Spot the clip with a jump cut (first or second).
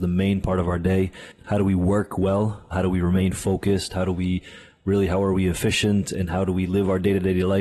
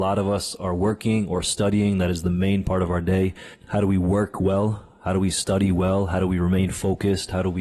first